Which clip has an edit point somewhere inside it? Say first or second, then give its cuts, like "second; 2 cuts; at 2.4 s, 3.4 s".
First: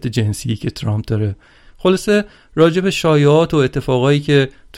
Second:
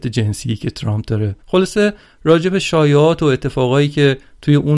second; 1 cut; at 1.4 s